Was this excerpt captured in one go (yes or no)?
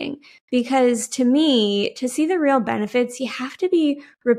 yes